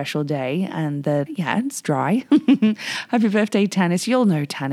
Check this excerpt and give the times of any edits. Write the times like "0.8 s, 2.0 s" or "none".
1.3 s